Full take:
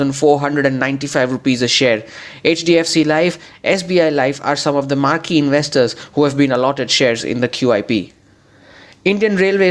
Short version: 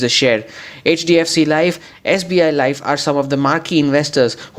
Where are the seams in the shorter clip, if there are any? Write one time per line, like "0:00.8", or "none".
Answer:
none